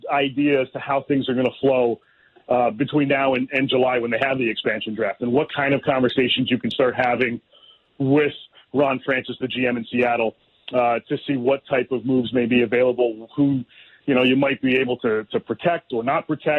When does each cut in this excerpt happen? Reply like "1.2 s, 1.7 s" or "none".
none